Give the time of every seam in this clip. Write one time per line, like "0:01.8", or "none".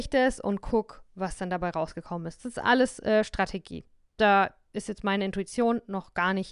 none